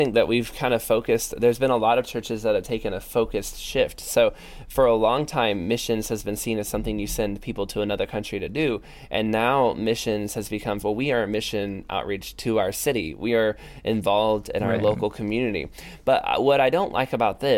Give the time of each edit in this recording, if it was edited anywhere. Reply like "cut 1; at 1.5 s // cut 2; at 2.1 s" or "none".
cut 1; at 10.8 s

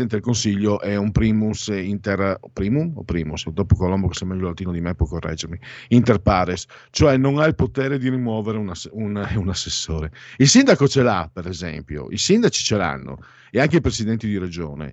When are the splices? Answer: none

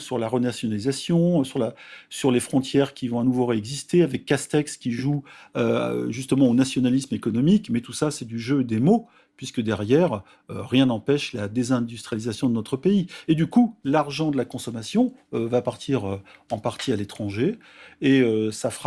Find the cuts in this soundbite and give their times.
none

